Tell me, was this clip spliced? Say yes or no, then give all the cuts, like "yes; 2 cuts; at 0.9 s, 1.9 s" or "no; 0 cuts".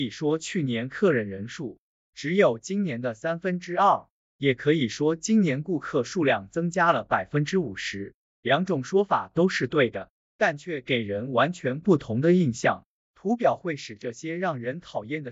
no; 0 cuts